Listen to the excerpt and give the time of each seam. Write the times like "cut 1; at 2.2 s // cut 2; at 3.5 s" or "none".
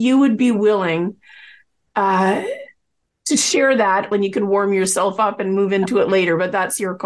cut 1; at 4.1 s